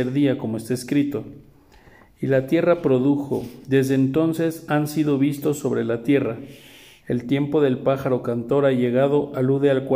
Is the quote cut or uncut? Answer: uncut